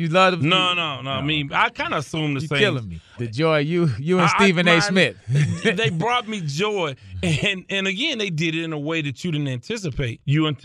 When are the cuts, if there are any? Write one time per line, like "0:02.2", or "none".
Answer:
0:03.2